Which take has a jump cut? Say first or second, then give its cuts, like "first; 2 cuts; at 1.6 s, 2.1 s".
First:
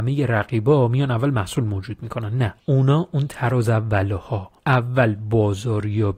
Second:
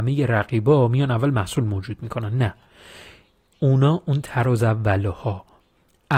first; 2 cuts; at 2.6 s, 4.6 s